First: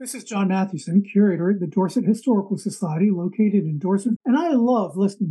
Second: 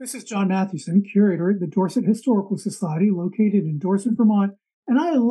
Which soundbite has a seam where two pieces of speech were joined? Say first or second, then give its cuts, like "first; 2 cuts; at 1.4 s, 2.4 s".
first; 1 cut; at 4.2 s